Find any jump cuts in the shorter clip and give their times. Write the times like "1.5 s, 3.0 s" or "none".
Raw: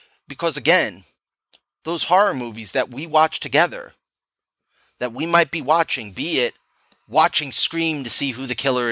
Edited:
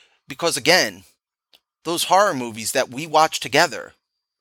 none